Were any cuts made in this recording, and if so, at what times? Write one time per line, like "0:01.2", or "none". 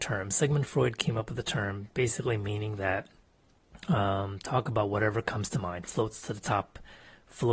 none